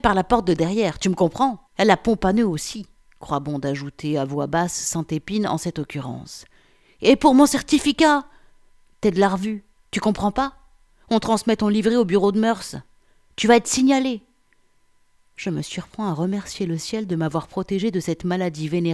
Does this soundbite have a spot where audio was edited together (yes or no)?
yes